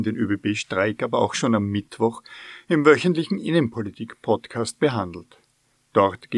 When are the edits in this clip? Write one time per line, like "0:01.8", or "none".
none

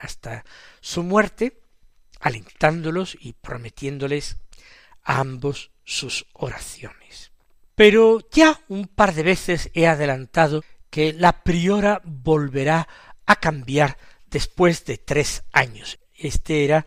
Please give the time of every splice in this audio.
0:16.0

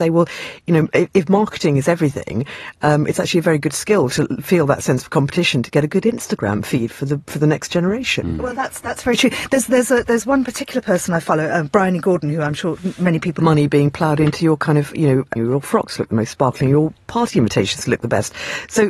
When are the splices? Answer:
0:13.4
0:15.4

